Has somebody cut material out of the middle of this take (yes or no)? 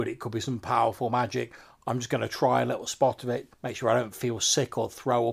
yes